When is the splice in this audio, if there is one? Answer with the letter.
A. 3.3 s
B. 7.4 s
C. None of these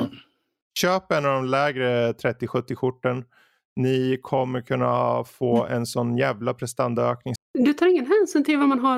B